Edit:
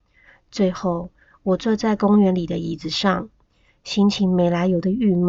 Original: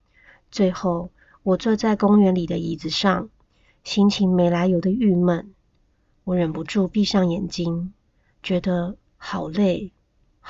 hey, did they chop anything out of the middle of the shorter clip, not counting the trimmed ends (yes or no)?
no